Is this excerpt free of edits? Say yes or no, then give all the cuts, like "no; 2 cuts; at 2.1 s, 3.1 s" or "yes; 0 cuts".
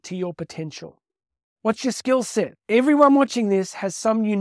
yes; 0 cuts